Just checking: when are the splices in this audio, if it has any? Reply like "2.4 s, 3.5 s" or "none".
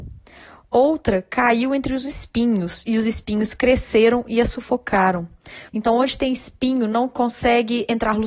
5.7 s